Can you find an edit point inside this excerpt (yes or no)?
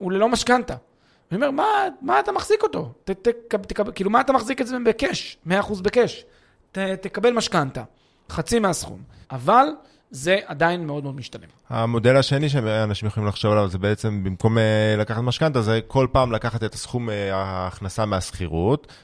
yes